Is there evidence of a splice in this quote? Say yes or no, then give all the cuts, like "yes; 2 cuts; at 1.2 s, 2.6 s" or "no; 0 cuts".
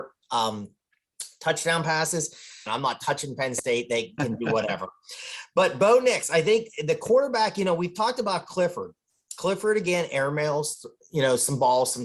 yes; 1 cut; at 2.7 s